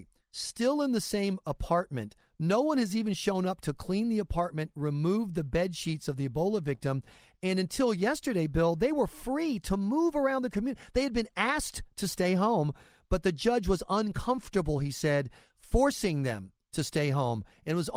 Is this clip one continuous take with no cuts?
yes; 0 cuts

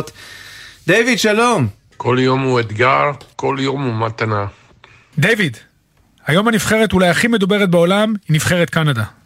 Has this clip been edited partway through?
no; 0 cuts

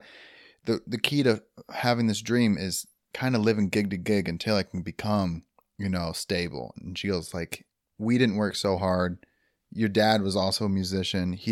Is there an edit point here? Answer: no; 0 cuts

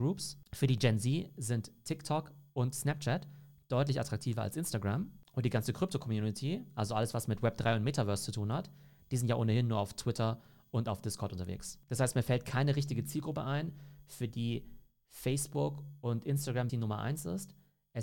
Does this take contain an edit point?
yes; 1 cut; at 16.7 s

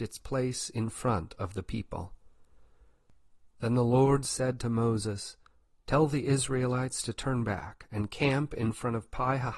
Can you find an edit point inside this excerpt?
no; 0 cuts

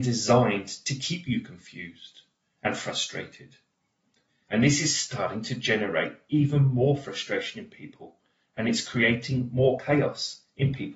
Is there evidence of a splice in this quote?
yes; 1 cut; at 4.5 s

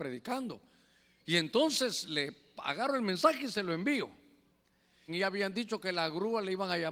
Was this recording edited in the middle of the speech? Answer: yes; 1 cut; at 5.1 s

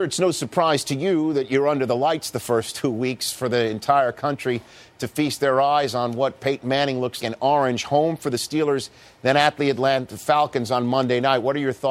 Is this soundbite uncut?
no; 1 cut; at 7.2 s

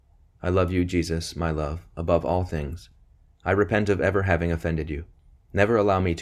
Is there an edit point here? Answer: no; 0 cuts

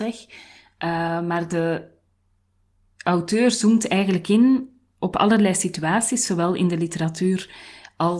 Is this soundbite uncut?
yes; 0 cuts

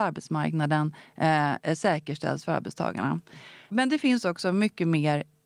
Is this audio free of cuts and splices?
yes; 0 cuts

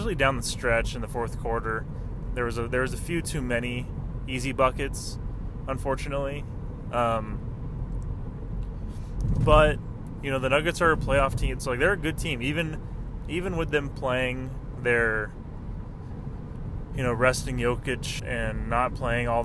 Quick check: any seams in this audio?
yes; 2 cuts; at 11.6 s, 18.2 s

